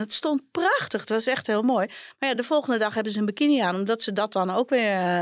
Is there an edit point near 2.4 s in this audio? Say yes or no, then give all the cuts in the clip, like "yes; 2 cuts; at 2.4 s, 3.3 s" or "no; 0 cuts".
no; 0 cuts